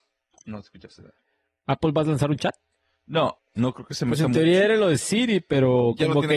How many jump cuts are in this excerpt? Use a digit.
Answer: 1